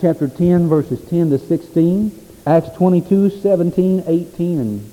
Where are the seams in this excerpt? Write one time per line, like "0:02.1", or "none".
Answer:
none